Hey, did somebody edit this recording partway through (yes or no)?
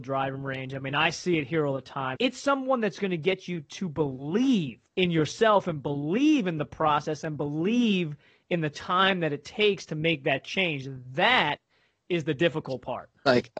yes